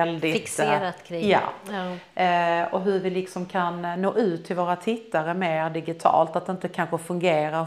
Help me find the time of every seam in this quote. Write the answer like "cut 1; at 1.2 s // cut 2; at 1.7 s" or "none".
none